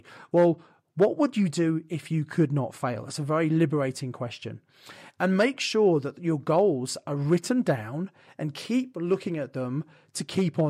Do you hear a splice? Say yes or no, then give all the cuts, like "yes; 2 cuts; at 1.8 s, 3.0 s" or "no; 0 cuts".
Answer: no; 0 cuts